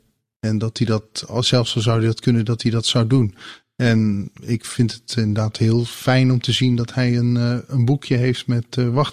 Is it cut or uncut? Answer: uncut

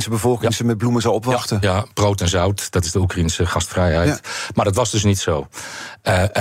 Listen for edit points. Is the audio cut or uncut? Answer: uncut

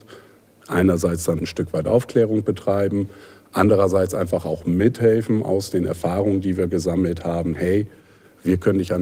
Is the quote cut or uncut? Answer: cut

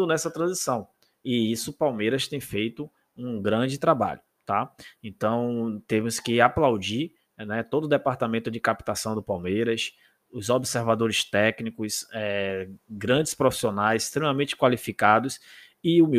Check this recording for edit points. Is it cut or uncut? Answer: uncut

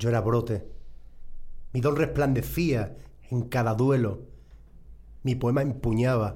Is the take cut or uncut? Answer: cut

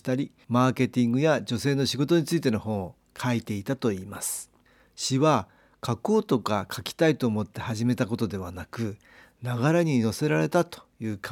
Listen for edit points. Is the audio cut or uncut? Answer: uncut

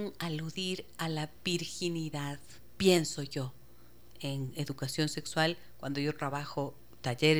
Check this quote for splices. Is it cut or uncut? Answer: uncut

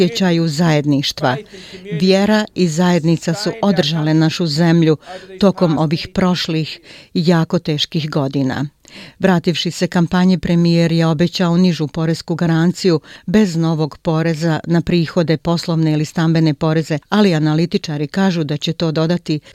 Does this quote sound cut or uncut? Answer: cut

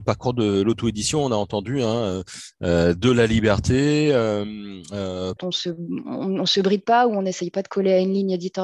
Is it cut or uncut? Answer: cut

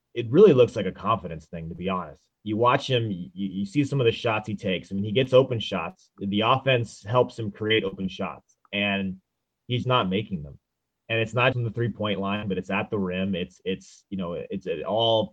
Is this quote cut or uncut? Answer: cut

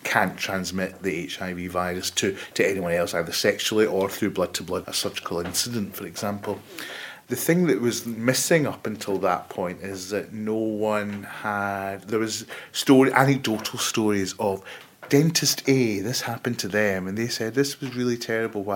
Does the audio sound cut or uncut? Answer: cut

